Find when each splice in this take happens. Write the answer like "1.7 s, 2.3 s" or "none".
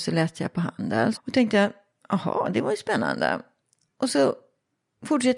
1.1 s